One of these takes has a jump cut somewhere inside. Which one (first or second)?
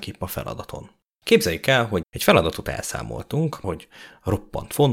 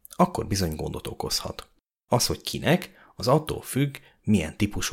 first